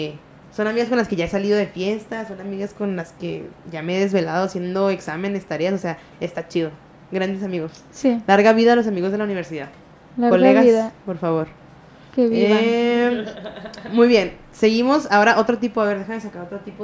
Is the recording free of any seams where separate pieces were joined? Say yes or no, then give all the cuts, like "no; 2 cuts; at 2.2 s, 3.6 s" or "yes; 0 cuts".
yes; 0 cuts